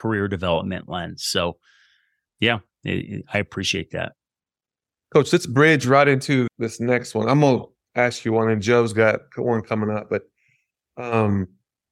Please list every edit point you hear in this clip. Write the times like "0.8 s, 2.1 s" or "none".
2.3 s, 6.5 s